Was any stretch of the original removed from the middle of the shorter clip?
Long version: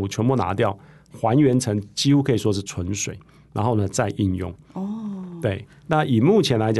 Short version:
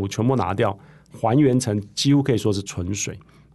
no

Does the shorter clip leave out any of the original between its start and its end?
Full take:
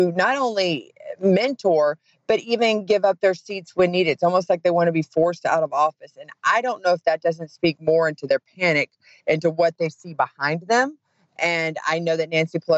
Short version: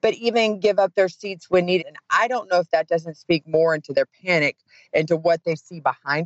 yes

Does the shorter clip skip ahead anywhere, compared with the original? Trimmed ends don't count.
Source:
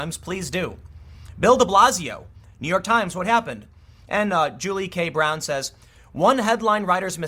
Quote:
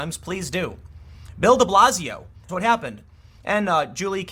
yes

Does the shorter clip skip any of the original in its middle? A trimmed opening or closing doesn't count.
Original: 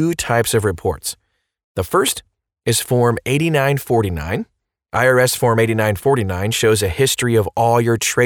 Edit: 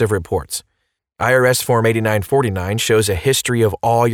yes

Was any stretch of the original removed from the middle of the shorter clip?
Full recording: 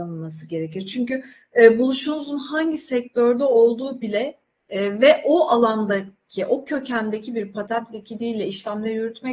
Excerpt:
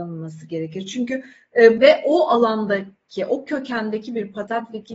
yes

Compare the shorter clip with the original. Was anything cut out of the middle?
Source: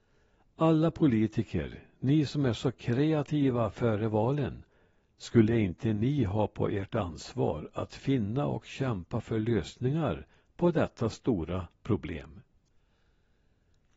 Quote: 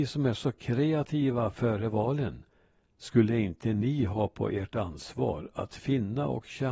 no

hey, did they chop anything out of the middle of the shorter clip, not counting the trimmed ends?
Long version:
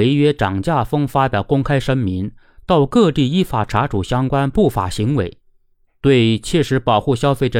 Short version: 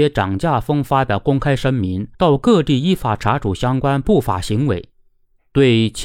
yes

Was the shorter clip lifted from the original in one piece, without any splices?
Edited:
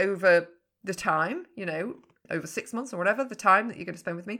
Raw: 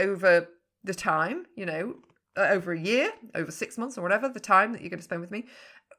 no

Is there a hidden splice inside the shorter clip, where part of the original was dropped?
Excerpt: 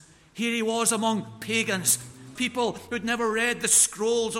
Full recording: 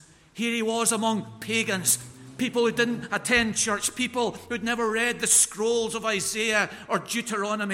yes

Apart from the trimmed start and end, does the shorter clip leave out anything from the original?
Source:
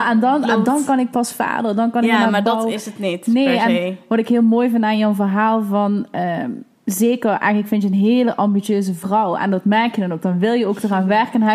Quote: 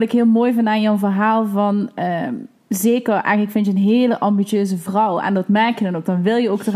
no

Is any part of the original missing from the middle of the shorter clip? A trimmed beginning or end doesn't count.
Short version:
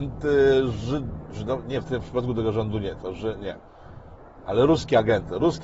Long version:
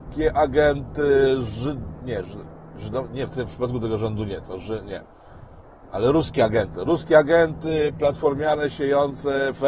yes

